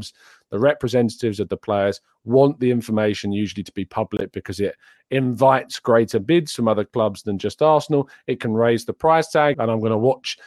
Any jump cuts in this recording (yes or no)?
yes